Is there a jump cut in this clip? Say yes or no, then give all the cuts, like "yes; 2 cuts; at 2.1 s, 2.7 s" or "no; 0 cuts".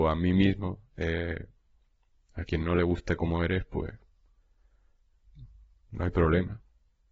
no; 0 cuts